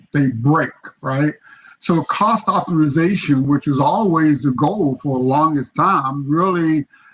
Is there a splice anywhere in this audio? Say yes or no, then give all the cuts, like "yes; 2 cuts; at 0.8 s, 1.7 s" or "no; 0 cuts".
no; 0 cuts